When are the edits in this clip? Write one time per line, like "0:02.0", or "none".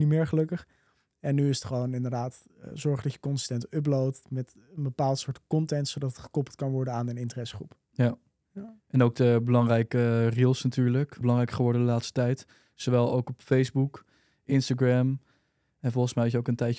0:11.2